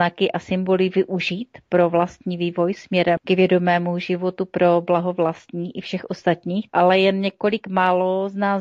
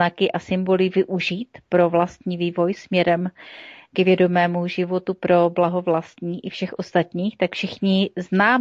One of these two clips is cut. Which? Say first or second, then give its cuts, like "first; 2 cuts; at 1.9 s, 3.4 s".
first; 2 cuts; at 3.2 s, 6.7 s